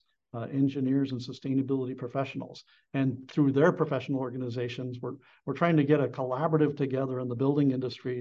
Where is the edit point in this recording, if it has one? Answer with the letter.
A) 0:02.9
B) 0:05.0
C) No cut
C